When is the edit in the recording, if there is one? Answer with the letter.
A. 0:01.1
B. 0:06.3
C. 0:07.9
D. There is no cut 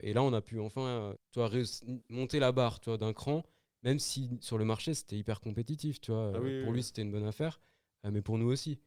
A